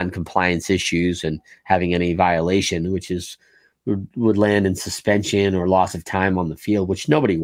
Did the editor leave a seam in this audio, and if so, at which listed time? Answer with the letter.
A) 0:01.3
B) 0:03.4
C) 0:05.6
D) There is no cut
D